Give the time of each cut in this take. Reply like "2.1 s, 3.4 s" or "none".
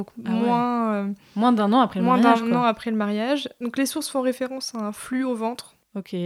none